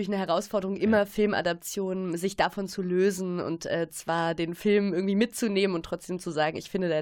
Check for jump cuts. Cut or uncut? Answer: uncut